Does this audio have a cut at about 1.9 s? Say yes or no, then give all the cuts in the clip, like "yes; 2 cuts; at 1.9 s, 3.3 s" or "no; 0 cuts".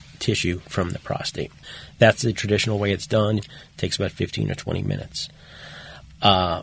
no; 1 cut; at 3.4 s